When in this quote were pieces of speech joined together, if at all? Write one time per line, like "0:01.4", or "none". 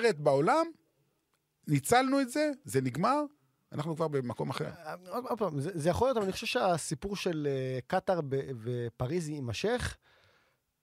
none